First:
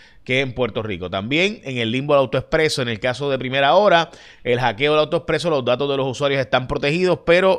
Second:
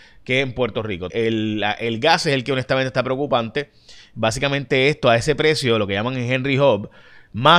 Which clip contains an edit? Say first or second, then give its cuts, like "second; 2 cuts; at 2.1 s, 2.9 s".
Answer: second; 1 cut; at 1.1 s